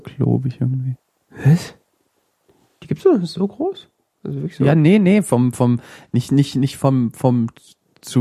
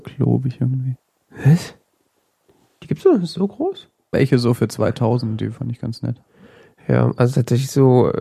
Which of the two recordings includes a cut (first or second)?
second